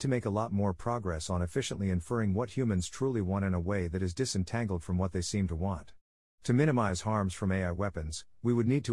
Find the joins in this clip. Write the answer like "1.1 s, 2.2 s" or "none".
none